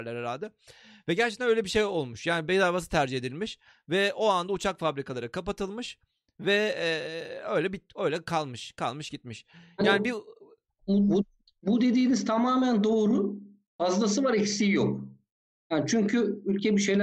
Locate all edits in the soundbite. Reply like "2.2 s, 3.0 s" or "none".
none